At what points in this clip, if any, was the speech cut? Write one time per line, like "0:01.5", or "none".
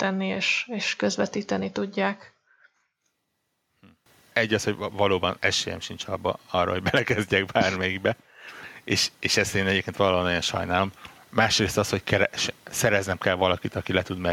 0:04.3